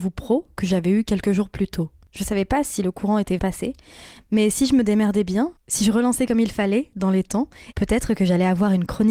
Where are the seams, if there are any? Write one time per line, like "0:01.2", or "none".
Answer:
0:03.4
0:07.7